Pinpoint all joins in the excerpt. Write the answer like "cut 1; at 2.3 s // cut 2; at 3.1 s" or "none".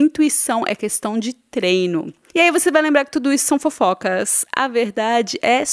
none